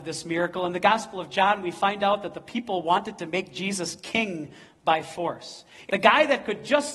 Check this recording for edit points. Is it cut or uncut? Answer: cut